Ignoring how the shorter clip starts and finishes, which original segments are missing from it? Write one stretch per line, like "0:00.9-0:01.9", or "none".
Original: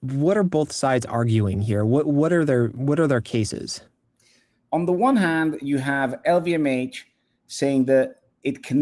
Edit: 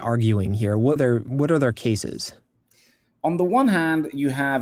0:02.0-0:02.4

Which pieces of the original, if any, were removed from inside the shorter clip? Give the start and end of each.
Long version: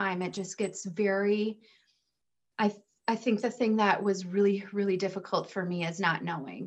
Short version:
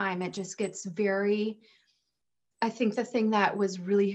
0:02.5-0:03.0

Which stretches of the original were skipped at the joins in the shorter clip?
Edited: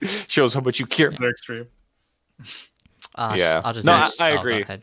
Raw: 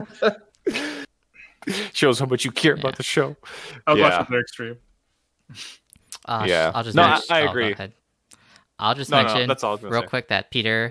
0:02.8-0:04.3

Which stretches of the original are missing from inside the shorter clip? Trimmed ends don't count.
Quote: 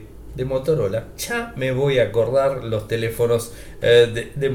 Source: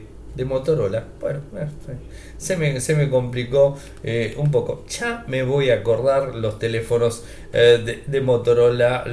0:01.2-0:04.9

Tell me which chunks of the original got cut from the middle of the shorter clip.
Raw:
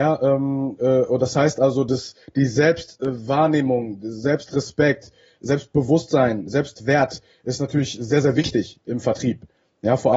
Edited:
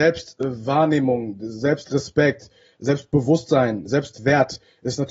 none

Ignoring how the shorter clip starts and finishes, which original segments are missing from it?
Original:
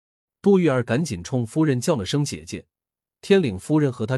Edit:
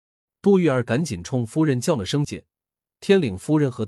0:02.2-0:02.5

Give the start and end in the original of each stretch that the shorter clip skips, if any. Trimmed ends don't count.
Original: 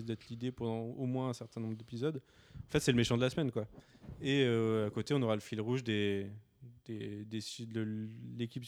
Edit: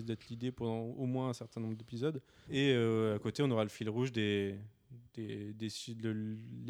0:02.5-0:04.2

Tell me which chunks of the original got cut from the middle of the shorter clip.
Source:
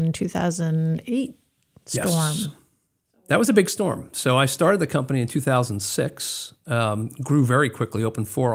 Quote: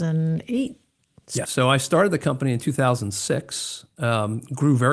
0:02.0-0:04.1

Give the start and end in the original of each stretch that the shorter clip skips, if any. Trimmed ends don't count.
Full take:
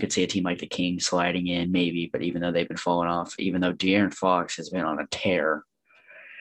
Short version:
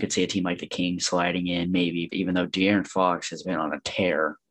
0:02.1-0:03.4

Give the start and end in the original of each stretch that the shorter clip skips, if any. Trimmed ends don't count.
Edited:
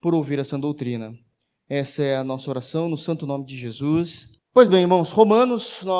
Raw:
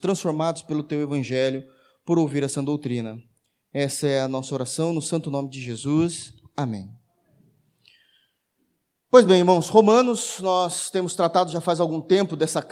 0:06.4-0:08.9

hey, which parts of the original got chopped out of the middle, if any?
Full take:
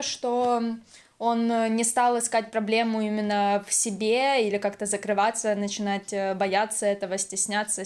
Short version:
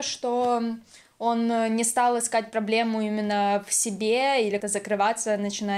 0:04.6-0:04.8

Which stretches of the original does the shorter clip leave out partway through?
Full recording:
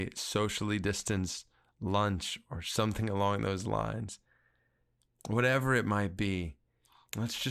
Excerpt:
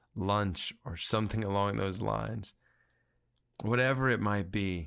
none

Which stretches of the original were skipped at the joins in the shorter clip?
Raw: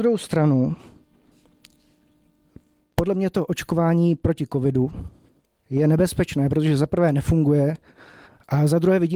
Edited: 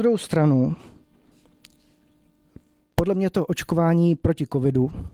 none

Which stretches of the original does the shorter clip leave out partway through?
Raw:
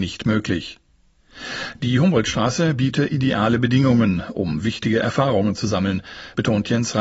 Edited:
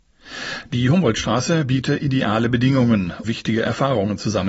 0:04.3-0:04.6

